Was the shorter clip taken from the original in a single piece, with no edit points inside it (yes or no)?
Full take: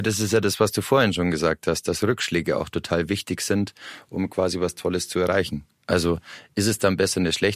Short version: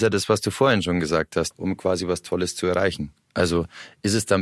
no